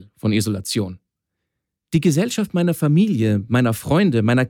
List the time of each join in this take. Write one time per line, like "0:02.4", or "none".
none